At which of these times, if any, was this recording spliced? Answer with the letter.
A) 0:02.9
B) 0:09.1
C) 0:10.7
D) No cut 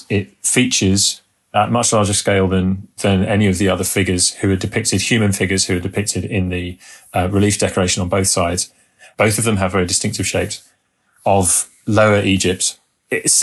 B